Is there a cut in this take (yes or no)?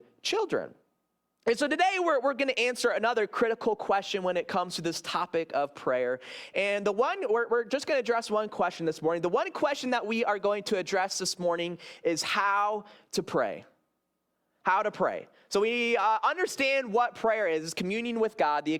no